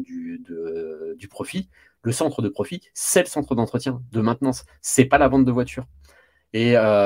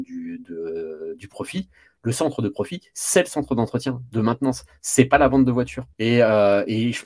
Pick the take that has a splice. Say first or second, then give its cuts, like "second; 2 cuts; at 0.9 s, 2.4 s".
second; 1 cut; at 5.9 s